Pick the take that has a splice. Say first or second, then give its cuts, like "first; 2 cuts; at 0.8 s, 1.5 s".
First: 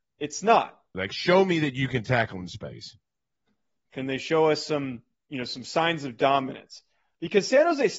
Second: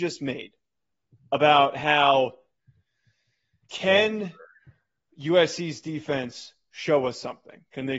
first; 2 cuts; at 0.9 s, 3.9 s